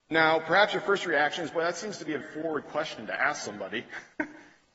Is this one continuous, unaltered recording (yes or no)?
no